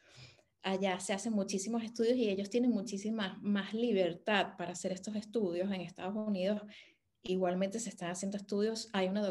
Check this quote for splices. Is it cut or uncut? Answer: uncut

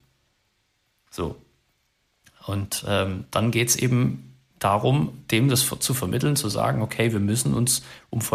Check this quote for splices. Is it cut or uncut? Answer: uncut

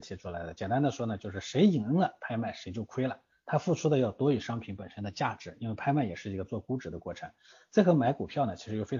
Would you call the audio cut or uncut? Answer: uncut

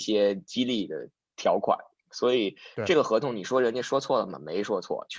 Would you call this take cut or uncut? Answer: uncut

